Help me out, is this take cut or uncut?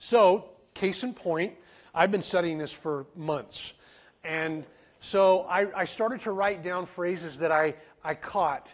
uncut